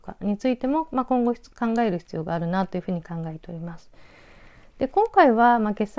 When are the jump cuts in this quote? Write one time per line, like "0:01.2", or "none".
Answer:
none